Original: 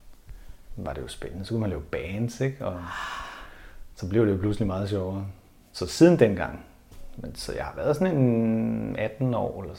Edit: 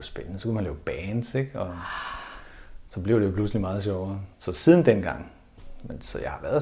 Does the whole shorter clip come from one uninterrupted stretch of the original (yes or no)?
no